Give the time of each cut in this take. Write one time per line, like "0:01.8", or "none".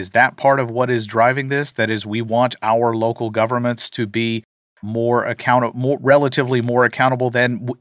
none